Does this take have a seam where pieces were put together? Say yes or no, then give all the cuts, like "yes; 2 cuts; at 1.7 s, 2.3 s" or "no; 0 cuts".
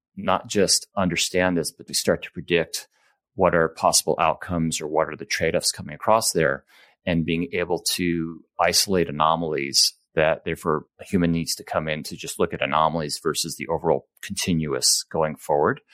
yes; 2 cuts; at 1.9 s, 10.9 s